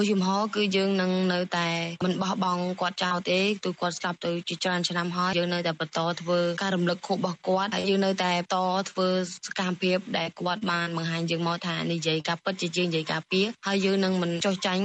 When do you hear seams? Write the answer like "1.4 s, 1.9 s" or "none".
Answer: 5.3 s